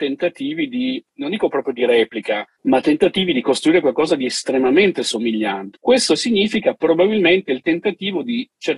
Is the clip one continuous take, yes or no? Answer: no